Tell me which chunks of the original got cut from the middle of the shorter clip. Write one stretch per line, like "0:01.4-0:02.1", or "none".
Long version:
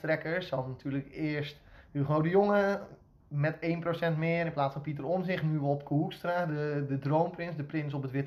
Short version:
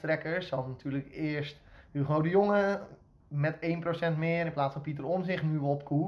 none

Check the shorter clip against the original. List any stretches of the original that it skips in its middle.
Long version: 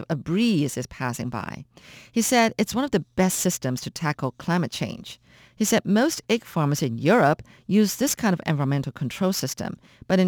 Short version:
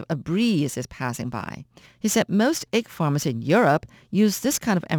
0:01.8-0:05.4

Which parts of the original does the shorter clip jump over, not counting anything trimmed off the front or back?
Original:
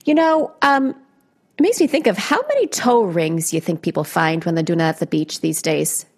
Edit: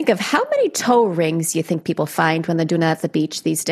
none

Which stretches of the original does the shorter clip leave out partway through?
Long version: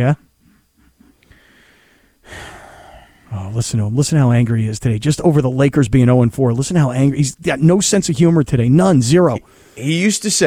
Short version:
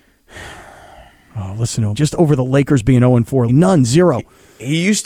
0:03.9-0:05.0
0:06.5-0:08.6

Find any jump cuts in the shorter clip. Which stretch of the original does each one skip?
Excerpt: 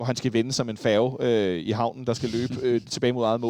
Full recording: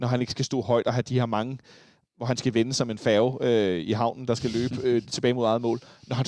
none

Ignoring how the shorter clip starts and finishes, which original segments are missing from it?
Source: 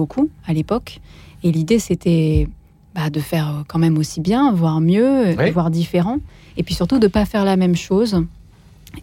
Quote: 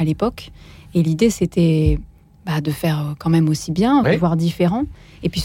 0:04.5-0:05.4

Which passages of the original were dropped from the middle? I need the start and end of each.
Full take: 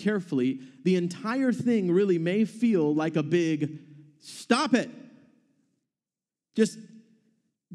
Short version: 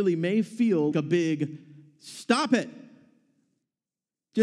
0:02.9-0:03.1

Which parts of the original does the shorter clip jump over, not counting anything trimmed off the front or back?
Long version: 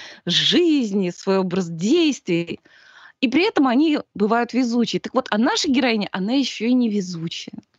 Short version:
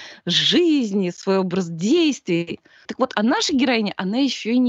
0:02.8-0:05.0

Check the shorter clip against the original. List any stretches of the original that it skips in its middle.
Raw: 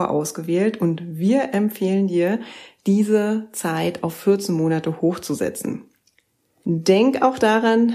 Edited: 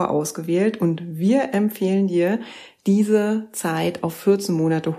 none

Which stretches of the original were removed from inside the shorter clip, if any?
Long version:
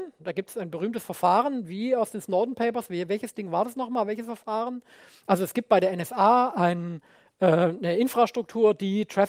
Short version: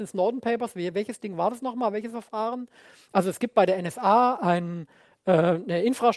none

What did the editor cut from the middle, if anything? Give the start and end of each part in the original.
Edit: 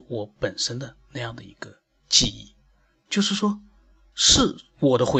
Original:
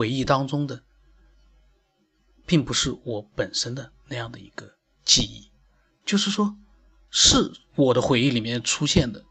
none

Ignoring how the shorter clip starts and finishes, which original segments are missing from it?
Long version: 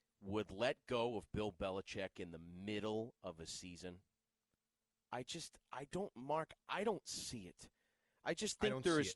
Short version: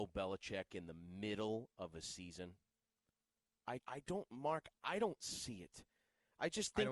0:05.2-0:05.6

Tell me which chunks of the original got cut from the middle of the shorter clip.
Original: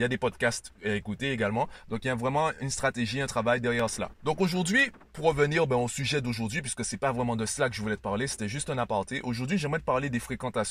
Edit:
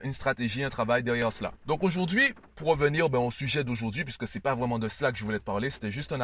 none

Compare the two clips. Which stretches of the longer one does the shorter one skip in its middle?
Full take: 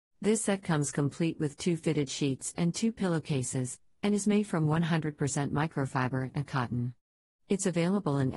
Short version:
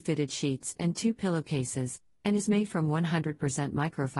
none

